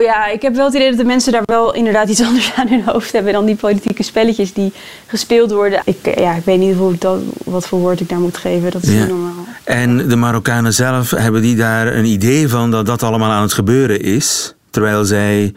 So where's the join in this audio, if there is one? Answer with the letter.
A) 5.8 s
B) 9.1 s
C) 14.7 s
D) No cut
A